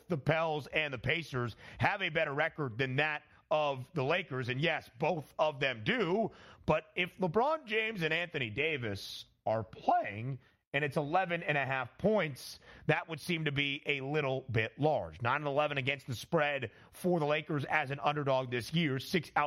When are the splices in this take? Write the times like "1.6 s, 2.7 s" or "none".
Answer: none